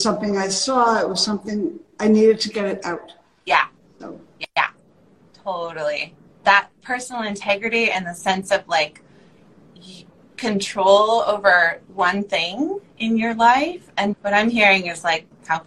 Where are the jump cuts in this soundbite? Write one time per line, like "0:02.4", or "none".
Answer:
0:06.4
0:14.1